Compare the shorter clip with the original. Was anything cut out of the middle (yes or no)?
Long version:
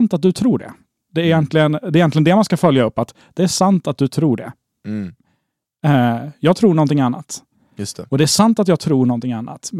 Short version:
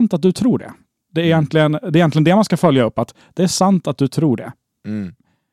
no